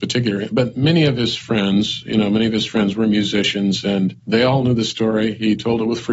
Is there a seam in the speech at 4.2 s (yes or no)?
yes